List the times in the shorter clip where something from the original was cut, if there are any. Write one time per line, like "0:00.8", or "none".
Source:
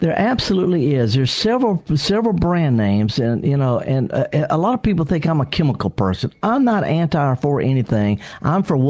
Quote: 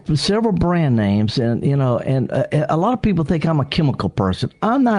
none